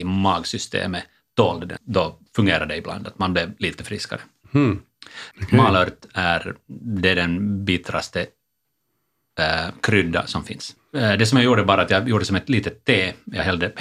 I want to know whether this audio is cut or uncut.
cut